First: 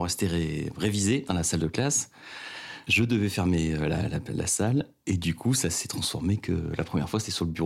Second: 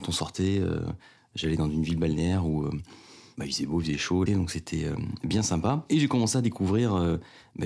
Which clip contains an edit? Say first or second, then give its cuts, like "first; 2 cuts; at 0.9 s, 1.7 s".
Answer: second; 1 cut; at 4.3 s